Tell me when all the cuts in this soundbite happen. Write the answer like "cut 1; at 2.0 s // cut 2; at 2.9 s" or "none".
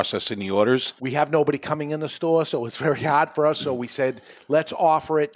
cut 1; at 1.0 s